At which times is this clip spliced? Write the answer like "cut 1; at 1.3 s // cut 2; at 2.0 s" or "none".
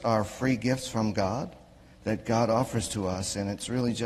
none